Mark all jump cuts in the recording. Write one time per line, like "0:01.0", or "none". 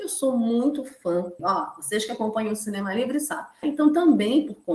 0:01.4
0:03.6